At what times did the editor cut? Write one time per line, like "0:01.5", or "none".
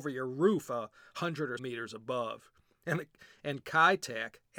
0:01.6